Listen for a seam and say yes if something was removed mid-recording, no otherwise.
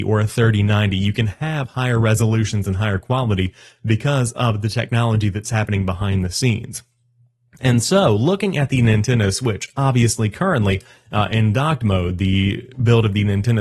no